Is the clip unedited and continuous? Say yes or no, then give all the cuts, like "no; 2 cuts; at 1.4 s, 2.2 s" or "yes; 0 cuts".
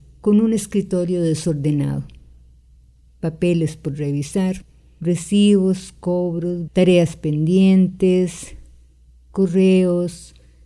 no; 1 cut; at 6.7 s